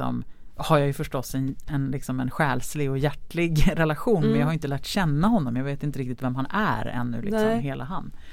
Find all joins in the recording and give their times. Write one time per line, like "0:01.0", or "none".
none